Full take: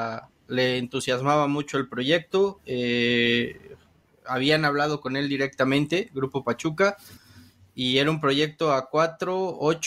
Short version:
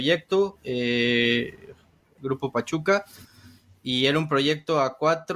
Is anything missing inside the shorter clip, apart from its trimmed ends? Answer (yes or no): yes